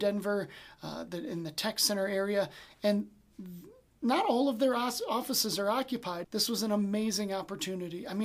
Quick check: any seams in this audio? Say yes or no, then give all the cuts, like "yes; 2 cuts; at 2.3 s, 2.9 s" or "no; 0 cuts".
yes; 1 cut; at 6.2 s